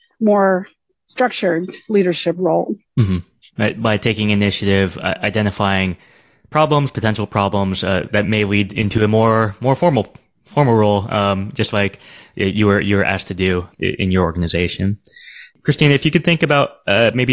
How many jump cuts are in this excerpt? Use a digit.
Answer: 1